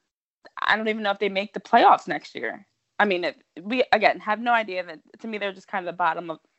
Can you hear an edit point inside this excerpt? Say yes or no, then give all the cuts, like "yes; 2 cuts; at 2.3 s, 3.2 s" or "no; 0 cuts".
no; 0 cuts